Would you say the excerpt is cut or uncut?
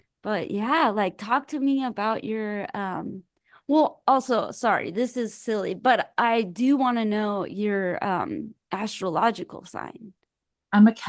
uncut